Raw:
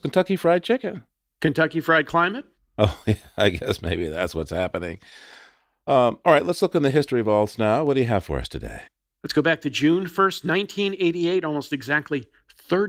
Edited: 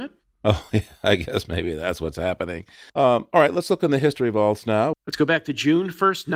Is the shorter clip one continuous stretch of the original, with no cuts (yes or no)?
no